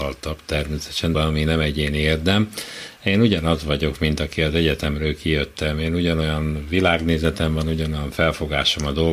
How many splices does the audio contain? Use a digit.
1